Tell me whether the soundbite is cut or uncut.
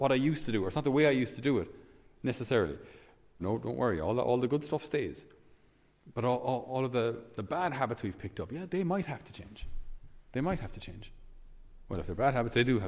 cut